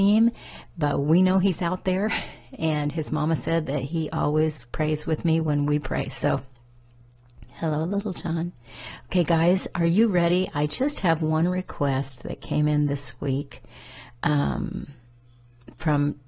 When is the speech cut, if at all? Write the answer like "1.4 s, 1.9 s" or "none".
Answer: none